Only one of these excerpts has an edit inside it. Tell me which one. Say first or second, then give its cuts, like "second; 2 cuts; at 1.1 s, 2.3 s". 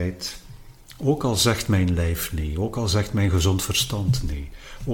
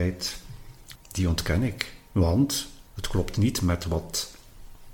second; 2 cuts; at 1.0 s, 2.9 s